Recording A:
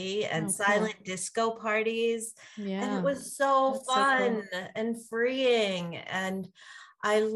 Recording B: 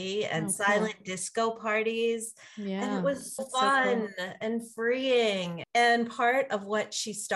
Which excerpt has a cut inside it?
B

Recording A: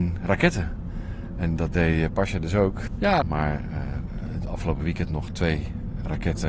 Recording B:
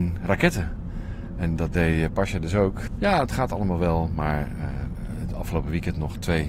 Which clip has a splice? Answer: A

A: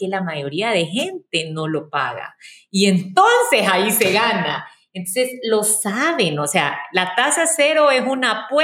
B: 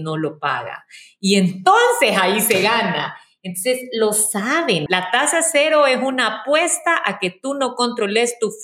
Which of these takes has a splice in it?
B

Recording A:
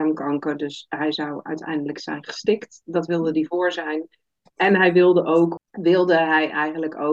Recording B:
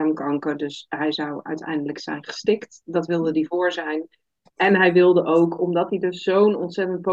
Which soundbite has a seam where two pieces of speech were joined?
A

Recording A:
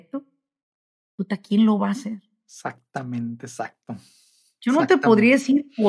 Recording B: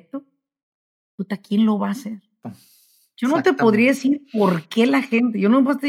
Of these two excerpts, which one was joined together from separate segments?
B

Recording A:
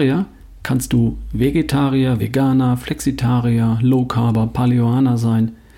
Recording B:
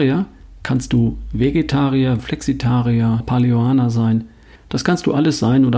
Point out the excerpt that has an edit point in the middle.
B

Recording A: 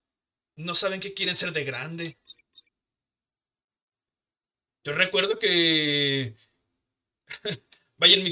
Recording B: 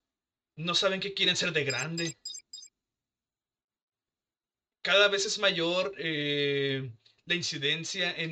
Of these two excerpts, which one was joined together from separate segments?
A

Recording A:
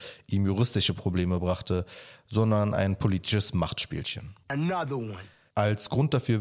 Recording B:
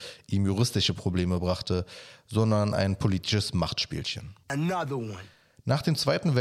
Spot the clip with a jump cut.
A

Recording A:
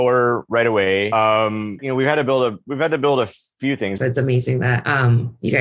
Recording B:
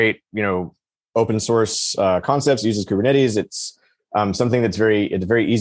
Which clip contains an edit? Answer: A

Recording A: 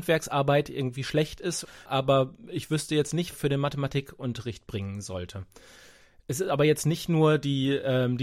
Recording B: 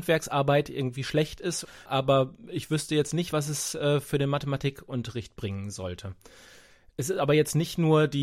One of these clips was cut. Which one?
A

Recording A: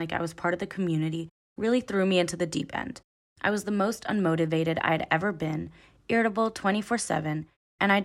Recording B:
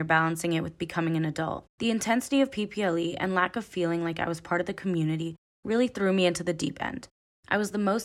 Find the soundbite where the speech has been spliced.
B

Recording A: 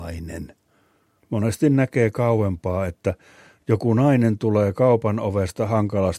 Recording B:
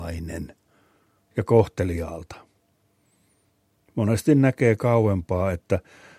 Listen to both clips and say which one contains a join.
A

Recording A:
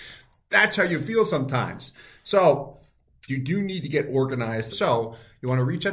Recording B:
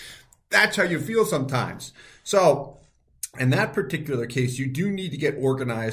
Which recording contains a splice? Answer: A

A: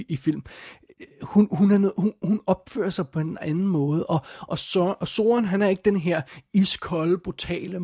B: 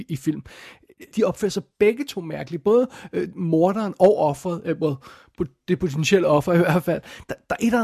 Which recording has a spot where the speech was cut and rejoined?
B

